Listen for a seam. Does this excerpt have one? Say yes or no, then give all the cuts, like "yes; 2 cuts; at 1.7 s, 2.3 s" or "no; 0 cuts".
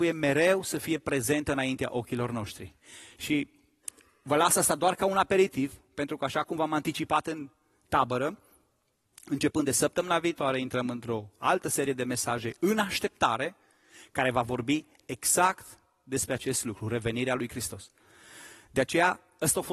no; 0 cuts